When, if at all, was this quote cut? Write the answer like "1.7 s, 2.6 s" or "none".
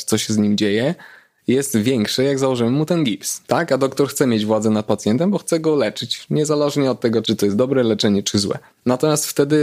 3.4 s, 7.2 s, 8.2 s